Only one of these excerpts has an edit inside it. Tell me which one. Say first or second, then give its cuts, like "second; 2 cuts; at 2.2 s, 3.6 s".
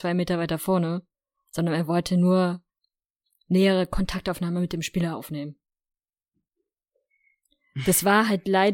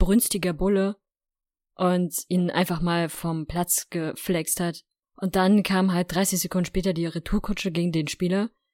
second; 1 cut; at 5.0 s